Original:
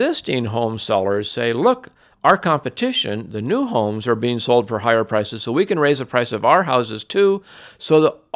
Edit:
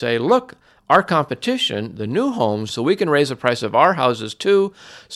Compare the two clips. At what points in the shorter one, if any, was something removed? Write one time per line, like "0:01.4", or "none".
0:02.7